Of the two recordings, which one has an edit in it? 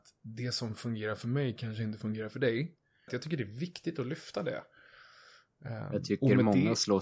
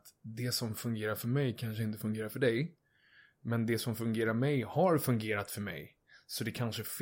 first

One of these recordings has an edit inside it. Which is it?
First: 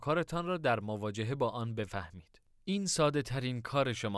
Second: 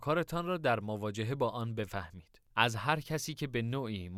second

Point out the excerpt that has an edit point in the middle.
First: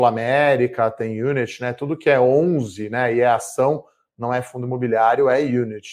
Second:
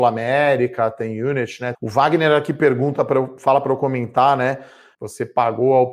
second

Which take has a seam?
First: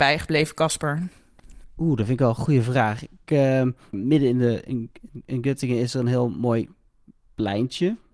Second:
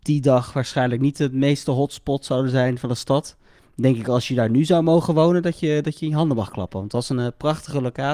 first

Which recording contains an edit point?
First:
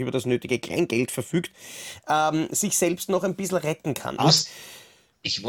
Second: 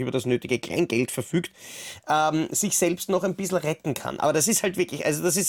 first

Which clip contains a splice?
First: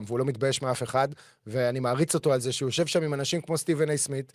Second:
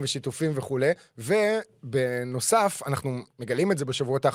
second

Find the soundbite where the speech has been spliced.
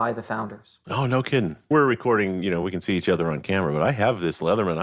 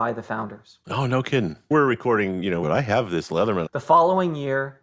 second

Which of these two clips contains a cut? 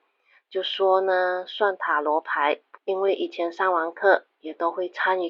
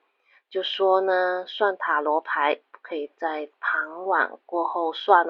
first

